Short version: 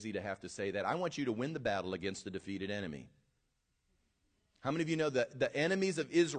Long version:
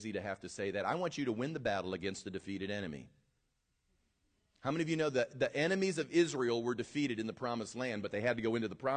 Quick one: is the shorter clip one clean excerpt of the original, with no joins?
yes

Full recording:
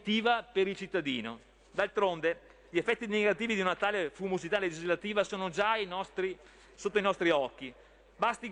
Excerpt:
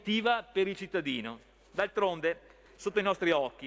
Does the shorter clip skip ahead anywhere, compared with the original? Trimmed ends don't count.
yes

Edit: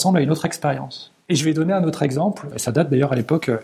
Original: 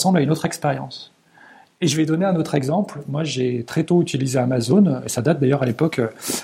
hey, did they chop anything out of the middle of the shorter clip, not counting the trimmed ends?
yes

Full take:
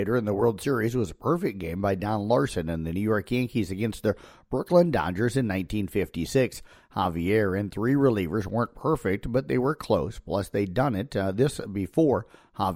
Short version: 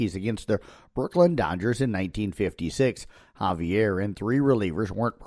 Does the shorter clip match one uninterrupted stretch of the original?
yes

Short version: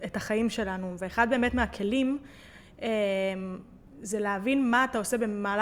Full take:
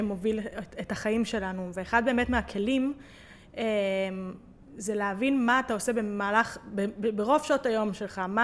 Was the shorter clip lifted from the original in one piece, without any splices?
yes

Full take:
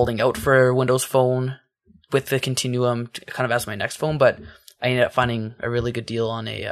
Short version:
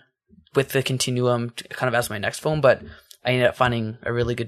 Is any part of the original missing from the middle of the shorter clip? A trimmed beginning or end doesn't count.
no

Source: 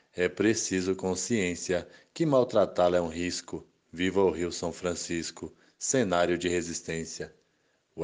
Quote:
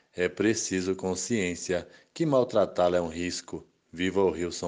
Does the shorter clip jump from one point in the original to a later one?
no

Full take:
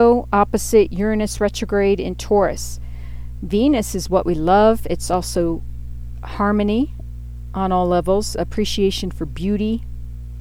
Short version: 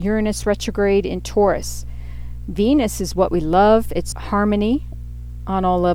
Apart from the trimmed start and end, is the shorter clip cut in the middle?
yes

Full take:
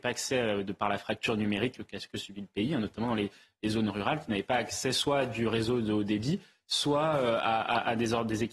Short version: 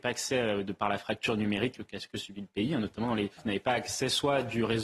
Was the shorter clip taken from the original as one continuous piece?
no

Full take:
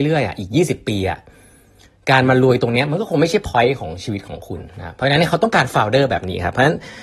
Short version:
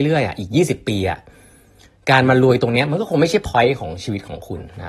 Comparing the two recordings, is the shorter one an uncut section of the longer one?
yes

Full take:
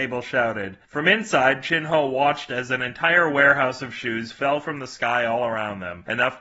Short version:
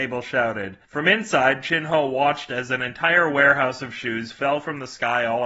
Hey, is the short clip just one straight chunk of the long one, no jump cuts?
yes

